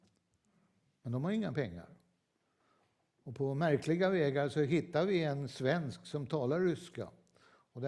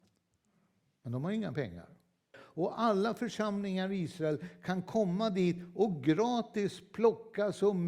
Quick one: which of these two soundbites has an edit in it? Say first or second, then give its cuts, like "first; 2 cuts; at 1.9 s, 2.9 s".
second; 1 cut; at 2.3 s